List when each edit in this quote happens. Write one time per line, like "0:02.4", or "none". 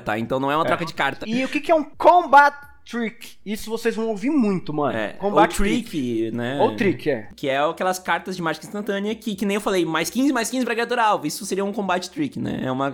0:01.2